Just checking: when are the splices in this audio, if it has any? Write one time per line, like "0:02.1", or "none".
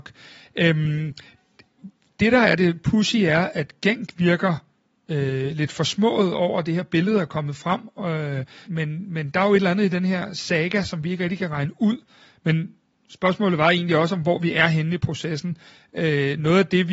0:08.6
0:12.3

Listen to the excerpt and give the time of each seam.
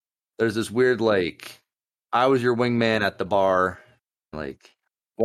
0:04.3

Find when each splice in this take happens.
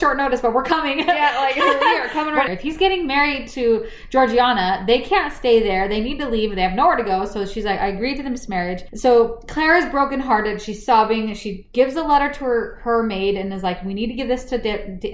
0:02.5

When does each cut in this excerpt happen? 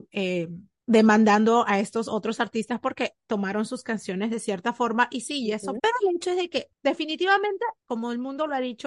0:05.8

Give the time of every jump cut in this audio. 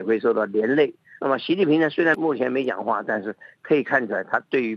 0:01.2

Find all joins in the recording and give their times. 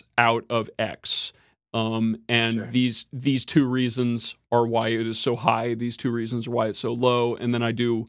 none

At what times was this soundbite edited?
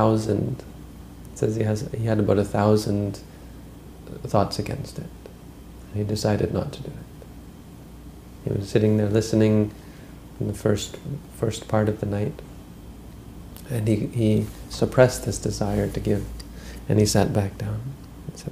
none

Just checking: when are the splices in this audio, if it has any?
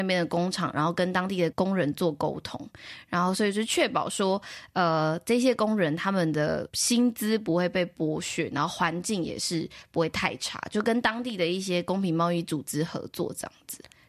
0:01.5

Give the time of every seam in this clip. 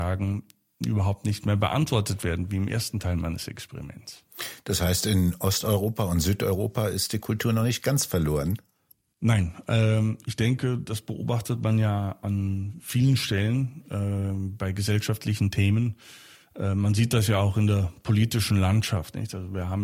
none

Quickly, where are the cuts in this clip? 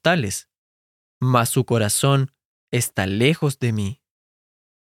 0:01.1

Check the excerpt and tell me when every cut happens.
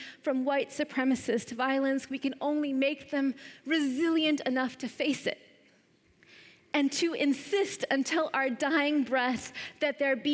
none

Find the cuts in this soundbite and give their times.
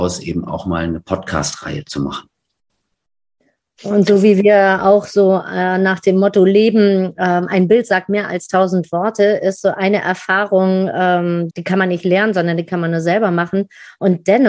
0:11.5

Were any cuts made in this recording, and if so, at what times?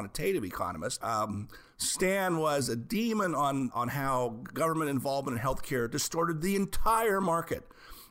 0:01.0
0:03.7

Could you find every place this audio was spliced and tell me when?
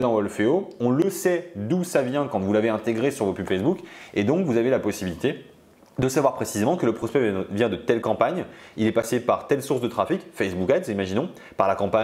none

